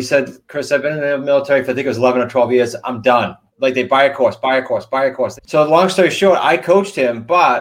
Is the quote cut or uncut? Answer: cut